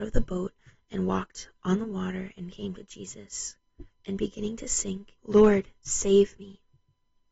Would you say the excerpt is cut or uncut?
cut